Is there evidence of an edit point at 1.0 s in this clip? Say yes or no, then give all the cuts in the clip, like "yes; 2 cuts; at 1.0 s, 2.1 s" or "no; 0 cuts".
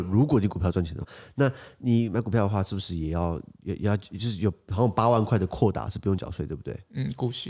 yes; 1 cut; at 1.0 s